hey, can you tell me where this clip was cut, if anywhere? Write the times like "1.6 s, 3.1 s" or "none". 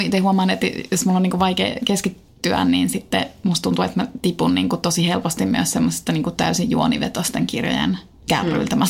none